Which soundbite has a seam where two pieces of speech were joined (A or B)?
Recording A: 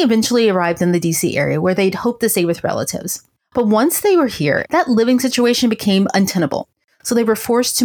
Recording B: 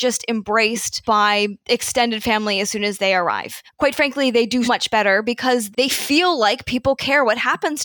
B